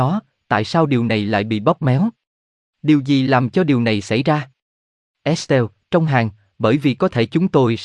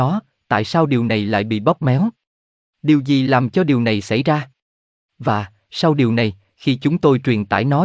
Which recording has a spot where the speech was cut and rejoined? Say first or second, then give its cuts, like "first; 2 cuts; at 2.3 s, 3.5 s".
second; 1 cut; at 5.0 s